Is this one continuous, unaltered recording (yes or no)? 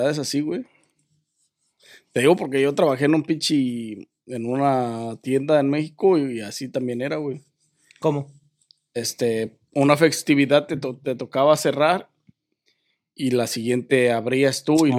yes